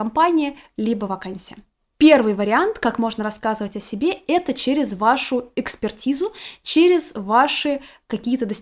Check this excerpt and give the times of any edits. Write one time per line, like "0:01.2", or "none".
none